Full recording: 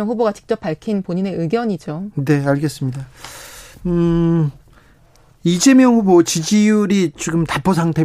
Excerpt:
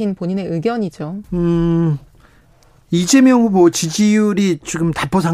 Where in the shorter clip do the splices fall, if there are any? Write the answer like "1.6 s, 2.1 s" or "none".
1.2 s